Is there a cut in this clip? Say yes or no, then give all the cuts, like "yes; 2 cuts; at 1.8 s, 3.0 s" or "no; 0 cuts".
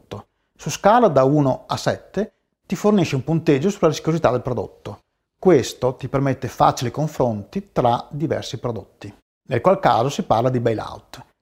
yes; 1 cut; at 9.4 s